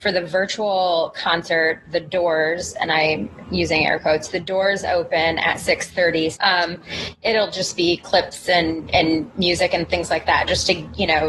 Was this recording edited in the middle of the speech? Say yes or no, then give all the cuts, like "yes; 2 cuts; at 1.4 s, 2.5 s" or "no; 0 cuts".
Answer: yes; 1 cut; at 6.3 s